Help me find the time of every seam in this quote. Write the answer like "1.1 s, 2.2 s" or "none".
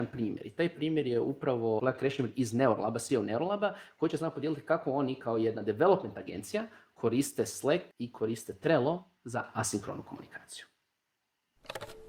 1.8 s, 7.9 s